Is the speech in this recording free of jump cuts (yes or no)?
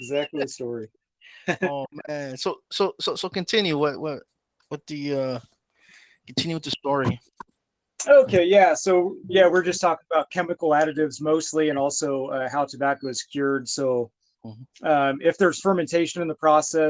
yes